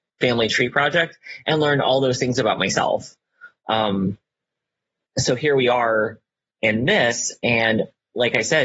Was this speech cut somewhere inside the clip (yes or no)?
no